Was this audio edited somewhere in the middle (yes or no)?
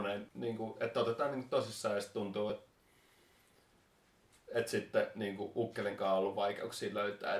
no